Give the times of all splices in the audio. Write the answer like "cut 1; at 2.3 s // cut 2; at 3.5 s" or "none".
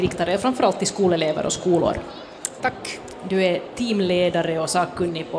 cut 1; at 2.6 s